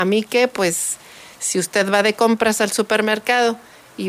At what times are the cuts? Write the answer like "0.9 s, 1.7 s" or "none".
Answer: none